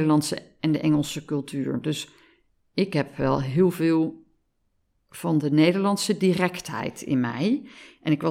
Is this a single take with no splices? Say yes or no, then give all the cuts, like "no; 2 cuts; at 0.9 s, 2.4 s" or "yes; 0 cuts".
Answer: yes; 0 cuts